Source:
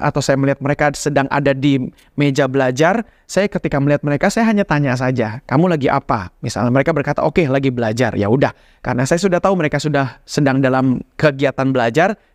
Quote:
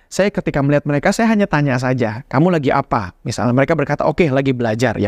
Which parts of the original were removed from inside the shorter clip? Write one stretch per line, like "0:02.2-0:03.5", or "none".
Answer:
none